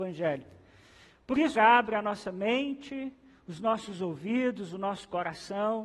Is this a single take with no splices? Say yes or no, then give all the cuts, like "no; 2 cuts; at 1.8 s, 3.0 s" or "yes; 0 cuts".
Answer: no; 1 cut; at 1.6 s